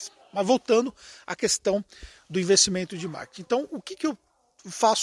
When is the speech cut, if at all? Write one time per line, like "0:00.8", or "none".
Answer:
none

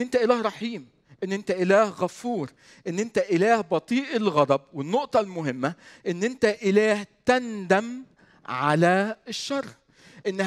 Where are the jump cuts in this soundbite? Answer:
none

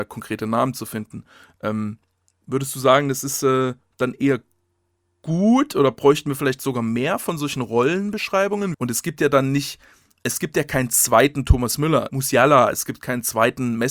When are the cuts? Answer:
0:08.7
0:12.1

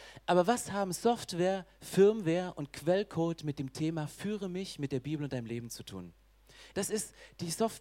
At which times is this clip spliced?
0:06.7

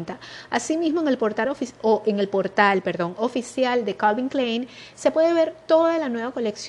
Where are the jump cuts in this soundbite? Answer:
none

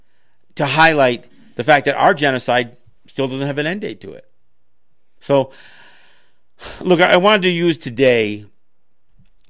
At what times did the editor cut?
0:05.2

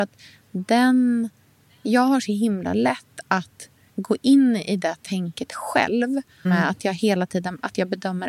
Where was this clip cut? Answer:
0:03.9
0:06.4

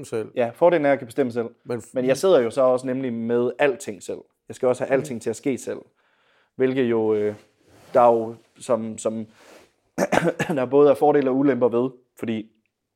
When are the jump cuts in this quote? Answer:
none

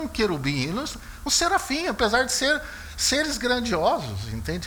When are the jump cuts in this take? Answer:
none

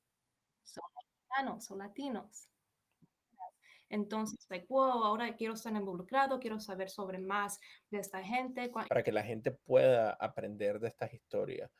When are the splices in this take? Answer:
0:04.5
0:08.8

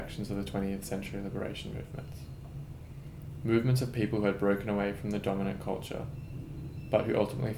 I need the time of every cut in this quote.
none

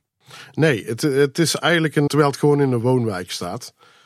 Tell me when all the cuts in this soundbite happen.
0:02.1

